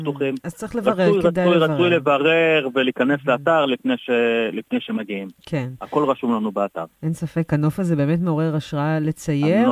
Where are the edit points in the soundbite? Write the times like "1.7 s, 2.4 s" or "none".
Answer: none

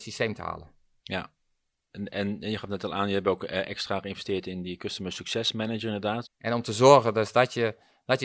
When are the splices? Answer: 1.0 s, 6.2 s

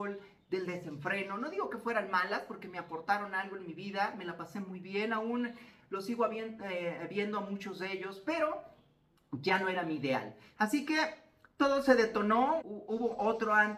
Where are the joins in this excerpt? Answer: 10.6 s, 12.6 s

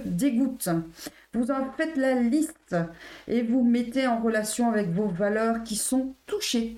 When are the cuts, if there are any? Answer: none

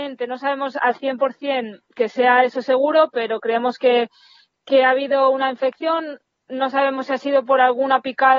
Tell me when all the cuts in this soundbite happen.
none

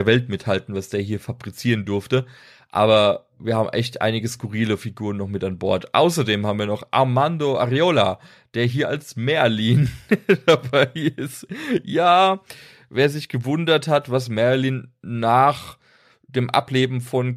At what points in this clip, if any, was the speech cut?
none

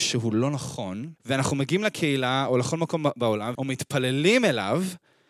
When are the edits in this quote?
1.2 s, 3.6 s

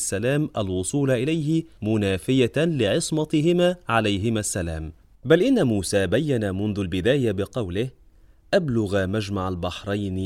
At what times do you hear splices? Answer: none

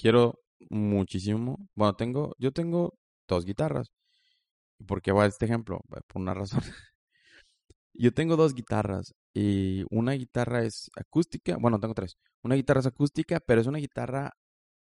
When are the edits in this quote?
none

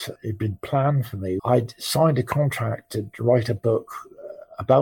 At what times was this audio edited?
1.4 s

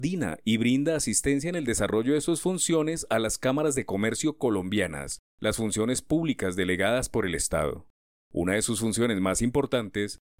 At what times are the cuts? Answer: 5.3 s

